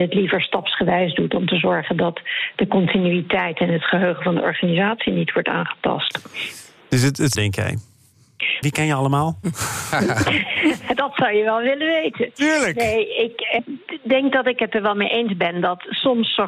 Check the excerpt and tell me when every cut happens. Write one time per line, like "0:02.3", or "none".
0:07.4
0:08.6
0:13.6